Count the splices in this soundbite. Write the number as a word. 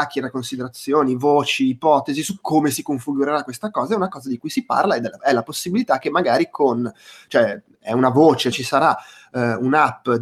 one